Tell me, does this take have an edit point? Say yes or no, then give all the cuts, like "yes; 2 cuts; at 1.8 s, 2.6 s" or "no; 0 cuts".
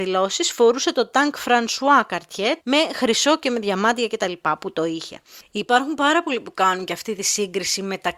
yes; 1 cut; at 2.6 s